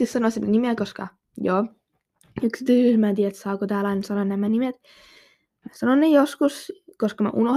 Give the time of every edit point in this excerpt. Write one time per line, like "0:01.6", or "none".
none